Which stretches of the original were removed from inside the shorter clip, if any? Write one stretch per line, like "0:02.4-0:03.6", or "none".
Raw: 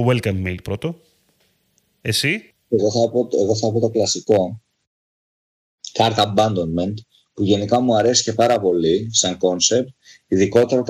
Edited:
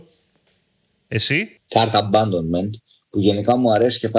0:02.6-0:05.9